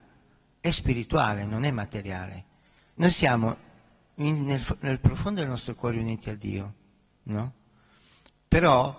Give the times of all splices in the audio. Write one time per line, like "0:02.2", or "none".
0:02.9